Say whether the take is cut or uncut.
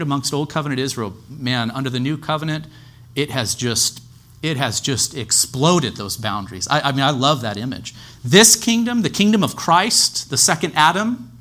uncut